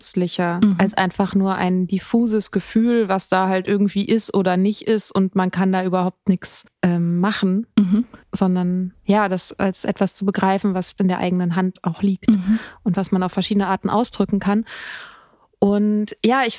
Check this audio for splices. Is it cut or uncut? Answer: uncut